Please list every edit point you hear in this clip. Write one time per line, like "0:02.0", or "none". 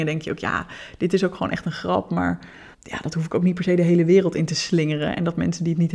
0:02.7